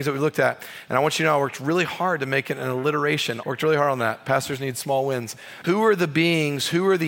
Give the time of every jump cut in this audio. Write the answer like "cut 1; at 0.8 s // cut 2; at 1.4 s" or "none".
cut 1; at 3.4 s // cut 2; at 5.6 s